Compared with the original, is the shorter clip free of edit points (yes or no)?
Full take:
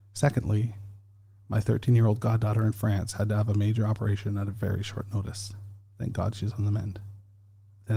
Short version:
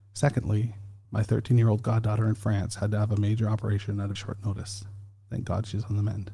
no